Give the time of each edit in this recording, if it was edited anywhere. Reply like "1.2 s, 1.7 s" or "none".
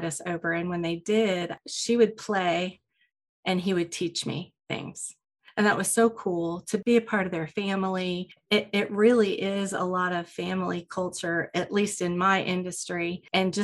8.4 s

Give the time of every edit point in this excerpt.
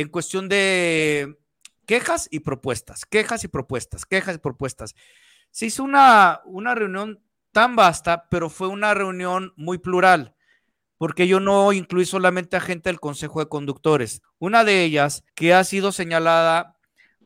14.2 s, 15.3 s

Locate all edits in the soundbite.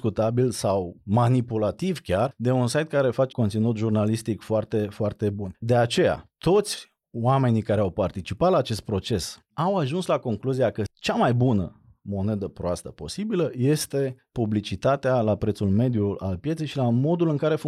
3.3 s

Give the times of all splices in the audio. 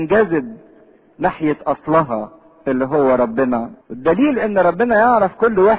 3.8 s

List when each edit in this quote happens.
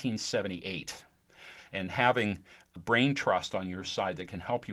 1.6 s, 2.8 s

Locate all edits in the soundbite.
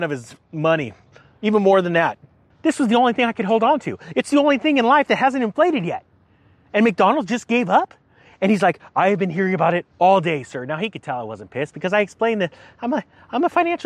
2.5 s

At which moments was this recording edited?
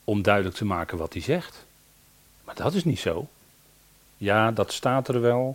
4.0 s

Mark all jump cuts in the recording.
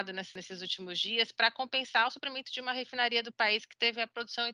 none

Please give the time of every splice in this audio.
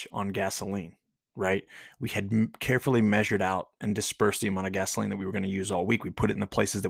none

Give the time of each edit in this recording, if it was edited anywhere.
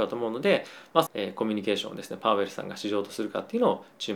1.1 s

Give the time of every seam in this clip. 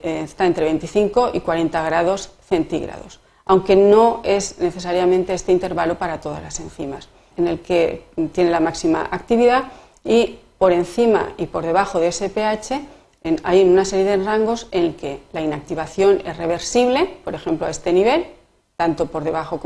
7.3 s

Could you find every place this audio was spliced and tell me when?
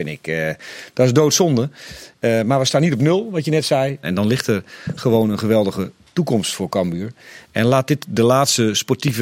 4.0 s

